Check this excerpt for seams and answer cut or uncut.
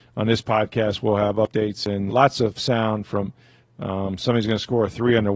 cut